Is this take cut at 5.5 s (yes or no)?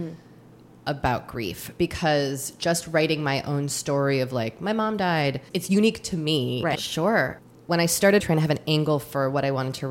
yes